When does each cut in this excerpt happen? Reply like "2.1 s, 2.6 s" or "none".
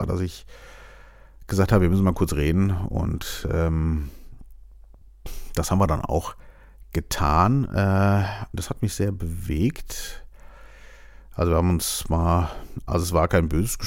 8.5 s

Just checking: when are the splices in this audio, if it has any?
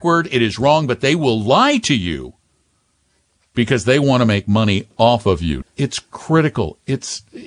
5.6 s

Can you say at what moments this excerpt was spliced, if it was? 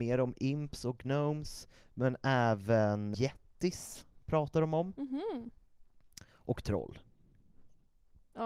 3.1 s

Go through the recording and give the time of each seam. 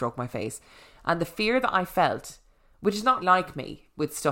3.2 s

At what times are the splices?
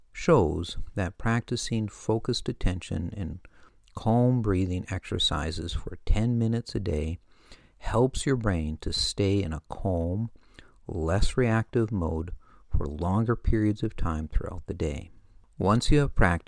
none

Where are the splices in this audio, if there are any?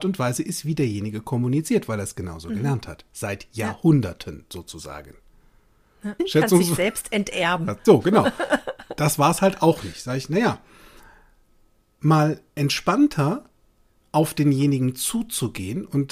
6.2 s

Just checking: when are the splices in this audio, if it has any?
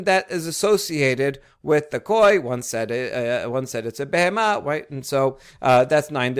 4.6 s

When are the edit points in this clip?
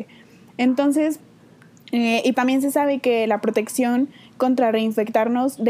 2.3 s

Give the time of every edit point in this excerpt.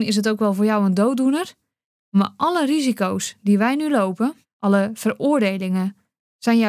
4.4 s

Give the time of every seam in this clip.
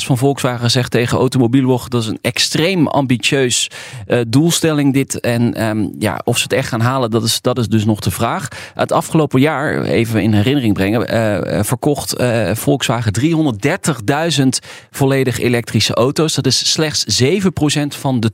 none

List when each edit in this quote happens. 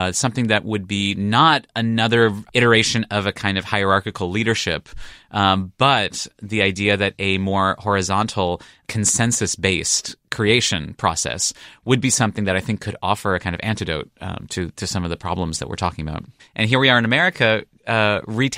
16.4 s

